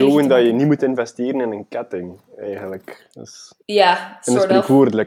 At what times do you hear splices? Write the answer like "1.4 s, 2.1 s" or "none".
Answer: 3.6 s